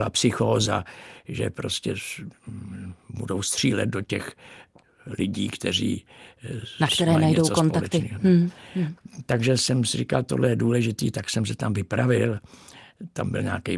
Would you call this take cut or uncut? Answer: uncut